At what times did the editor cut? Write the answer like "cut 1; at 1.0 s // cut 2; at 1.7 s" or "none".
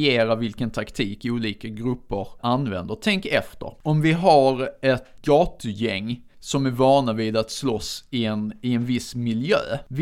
cut 1; at 2.4 s // cut 2; at 5.2 s